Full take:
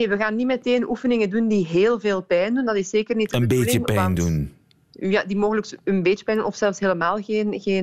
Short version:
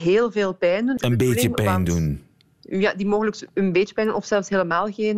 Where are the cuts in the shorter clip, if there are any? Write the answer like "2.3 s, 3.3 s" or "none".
1.0 s

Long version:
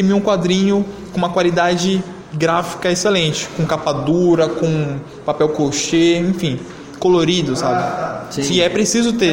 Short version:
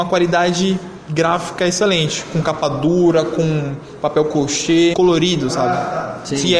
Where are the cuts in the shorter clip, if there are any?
4.9 s

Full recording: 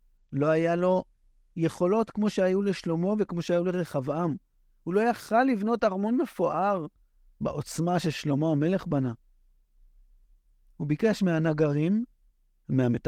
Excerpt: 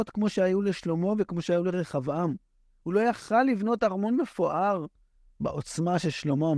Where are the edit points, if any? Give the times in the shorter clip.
none

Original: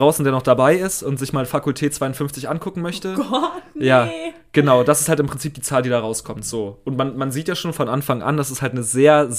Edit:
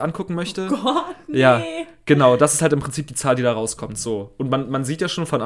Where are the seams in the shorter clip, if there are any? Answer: none

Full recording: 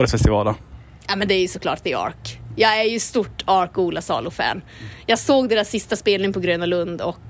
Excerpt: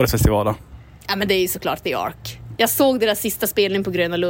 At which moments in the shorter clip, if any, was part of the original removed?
2.6 s

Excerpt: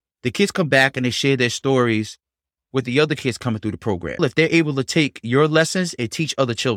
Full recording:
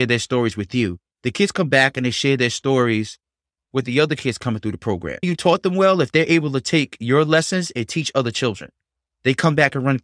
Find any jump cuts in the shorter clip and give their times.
4.2 s

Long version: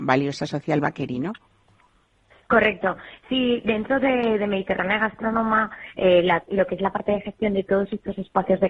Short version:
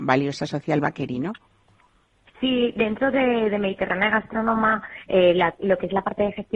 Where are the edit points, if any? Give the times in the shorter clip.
2.3 s

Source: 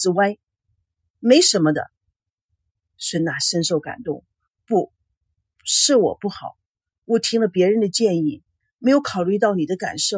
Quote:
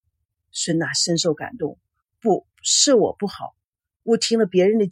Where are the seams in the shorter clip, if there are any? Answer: 2.5 s

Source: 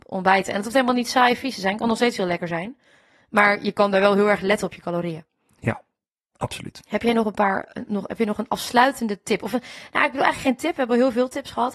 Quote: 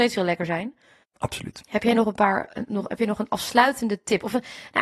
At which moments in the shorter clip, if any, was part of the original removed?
1.0 s

